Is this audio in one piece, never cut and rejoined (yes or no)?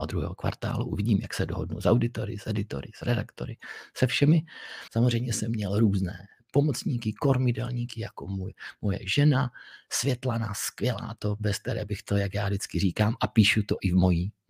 no